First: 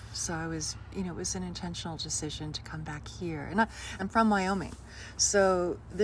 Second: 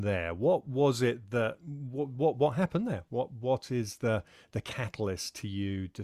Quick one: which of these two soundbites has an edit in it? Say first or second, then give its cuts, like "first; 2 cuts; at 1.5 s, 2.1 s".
first; 1 cut; at 4.0 s